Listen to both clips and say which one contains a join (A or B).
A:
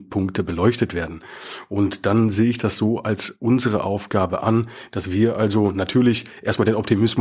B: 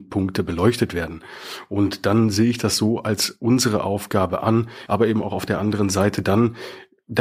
B